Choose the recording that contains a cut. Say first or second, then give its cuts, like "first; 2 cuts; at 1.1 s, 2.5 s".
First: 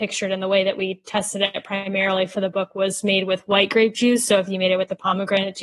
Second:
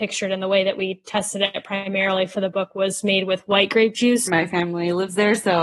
second; 1 cut; at 4.3 s